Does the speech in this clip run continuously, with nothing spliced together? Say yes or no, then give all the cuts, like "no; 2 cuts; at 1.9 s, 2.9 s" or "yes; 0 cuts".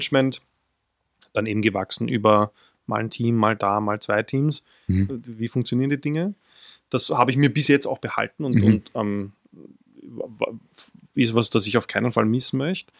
no; 1 cut; at 5.1 s